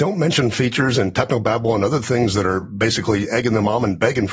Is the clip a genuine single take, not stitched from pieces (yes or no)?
yes